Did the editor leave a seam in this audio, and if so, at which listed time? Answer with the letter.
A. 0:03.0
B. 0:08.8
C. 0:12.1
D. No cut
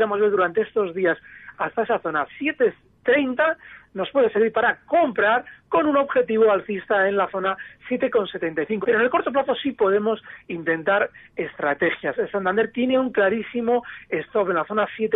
B